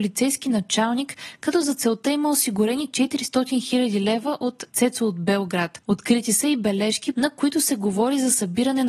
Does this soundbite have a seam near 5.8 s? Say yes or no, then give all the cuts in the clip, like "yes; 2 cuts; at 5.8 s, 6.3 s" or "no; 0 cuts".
yes; 2 cuts; at 5.8 s, 7.1 s